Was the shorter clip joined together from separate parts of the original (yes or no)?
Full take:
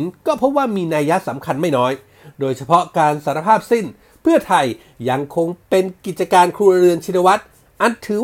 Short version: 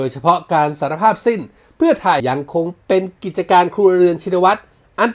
yes